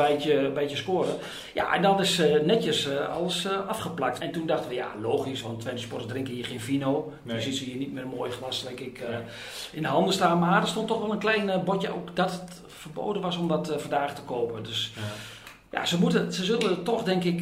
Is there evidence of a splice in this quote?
yes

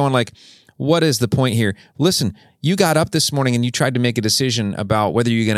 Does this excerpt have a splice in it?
no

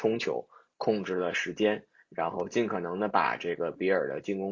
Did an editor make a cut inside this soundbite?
no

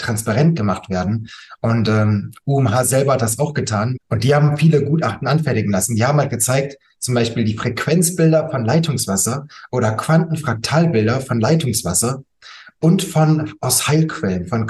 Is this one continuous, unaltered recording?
no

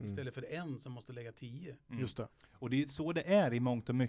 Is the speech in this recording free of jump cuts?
yes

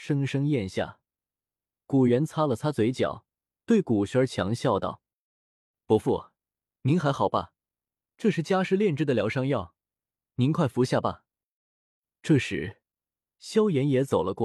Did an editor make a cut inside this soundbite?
no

